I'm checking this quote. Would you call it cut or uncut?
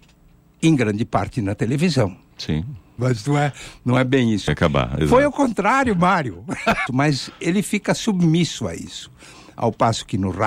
cut